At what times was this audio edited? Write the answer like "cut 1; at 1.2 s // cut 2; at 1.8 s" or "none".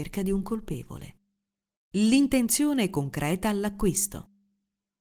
none